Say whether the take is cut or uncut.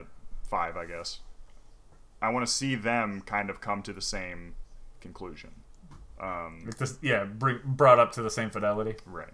uncut